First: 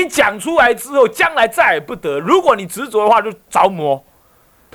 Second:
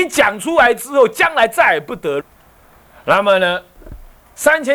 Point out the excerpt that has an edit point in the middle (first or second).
second